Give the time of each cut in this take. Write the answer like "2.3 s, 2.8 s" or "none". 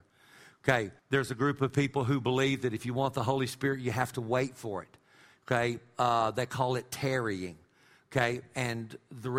1.0 s